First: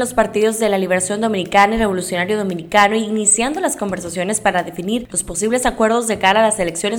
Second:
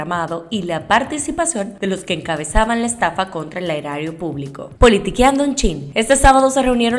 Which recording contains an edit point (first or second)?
second